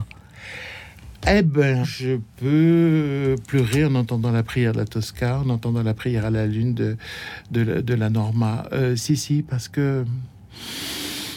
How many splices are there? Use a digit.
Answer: 1